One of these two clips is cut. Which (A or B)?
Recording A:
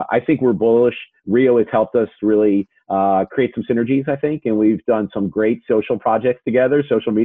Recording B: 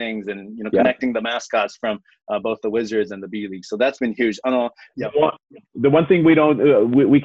B